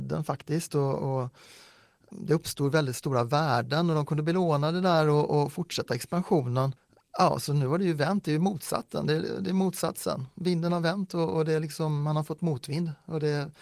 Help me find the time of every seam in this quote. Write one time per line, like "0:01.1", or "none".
none